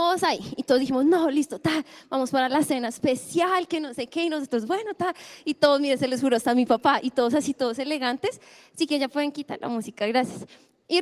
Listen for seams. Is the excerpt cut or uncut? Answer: uncut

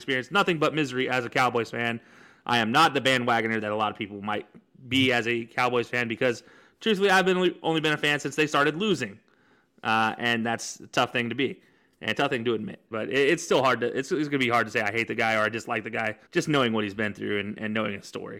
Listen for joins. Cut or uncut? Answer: cut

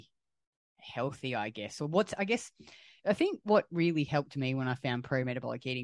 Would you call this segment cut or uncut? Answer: uncut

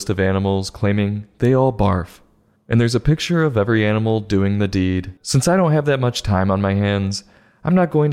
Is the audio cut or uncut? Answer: cut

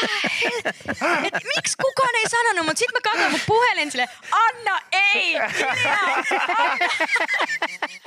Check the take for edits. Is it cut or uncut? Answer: cut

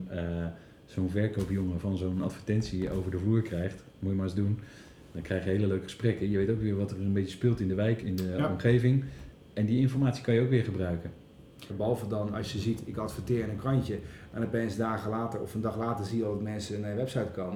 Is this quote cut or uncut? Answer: cut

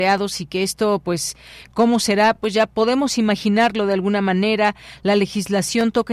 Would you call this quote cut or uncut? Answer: uncut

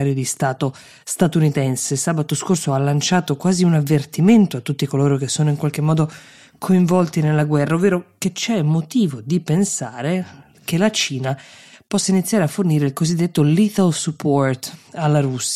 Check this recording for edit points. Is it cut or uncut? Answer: uncut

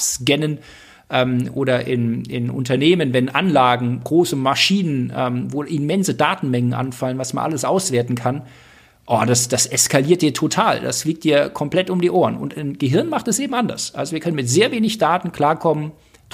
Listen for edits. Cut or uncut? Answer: uncut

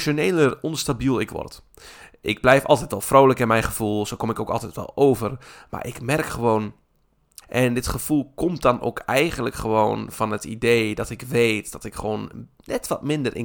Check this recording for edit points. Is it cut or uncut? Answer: cut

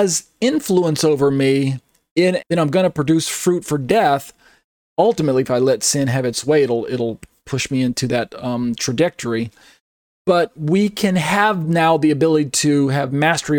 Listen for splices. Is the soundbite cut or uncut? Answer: cut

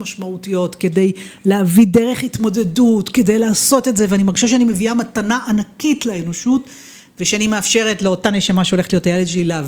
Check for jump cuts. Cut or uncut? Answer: uncut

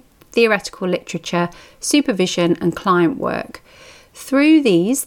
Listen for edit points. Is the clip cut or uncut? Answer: uncut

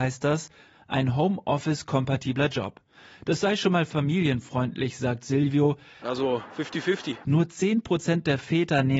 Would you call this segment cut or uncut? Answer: cut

